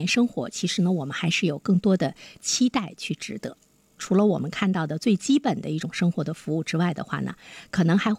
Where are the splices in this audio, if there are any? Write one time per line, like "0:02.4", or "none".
0:04.0

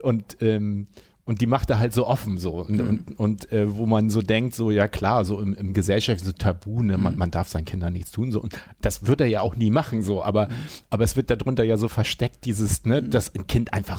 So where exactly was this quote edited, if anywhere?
none

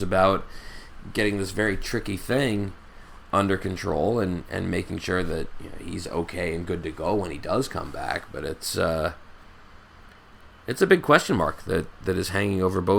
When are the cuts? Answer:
none

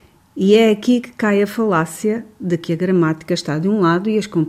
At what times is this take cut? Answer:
none

